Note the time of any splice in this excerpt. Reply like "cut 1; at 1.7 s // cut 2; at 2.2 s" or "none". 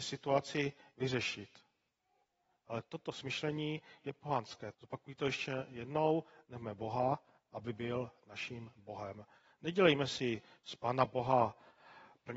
cut 1; at 4.7 s